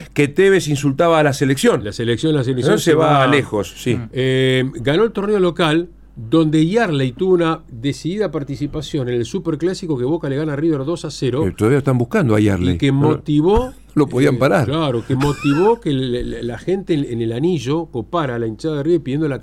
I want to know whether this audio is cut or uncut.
uncut